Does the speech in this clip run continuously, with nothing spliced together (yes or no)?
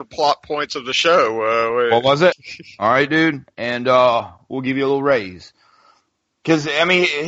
no